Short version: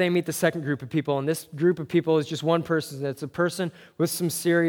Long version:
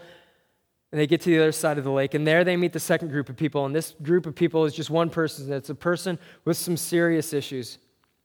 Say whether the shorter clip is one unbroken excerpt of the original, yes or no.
yes